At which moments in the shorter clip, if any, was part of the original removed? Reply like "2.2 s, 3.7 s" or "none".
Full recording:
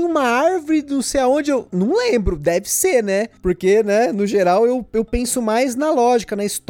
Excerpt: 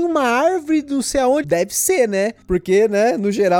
1.4 s